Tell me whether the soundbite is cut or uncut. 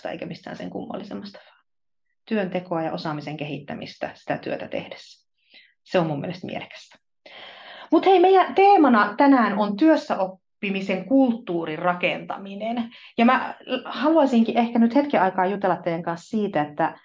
uncut